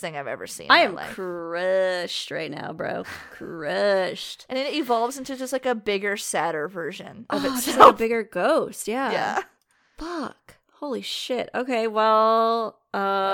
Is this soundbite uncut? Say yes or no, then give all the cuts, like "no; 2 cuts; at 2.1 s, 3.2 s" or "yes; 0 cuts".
yes; 0 cuts